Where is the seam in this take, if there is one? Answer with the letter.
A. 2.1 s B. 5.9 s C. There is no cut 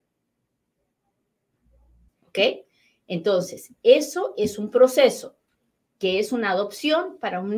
A